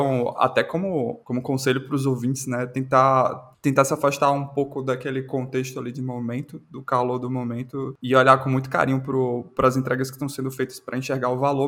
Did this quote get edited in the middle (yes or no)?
no